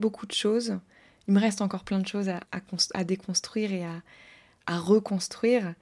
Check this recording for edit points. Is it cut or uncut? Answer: cut